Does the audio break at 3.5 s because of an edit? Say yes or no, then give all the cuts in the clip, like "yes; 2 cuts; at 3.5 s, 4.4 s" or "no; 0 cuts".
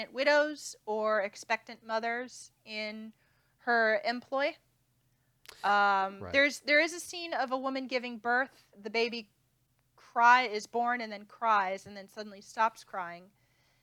no; 1 cut; at 8.7 s